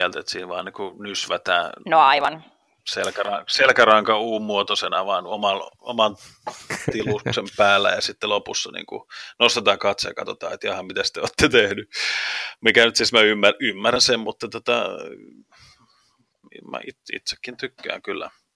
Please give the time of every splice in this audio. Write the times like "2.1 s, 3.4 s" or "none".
none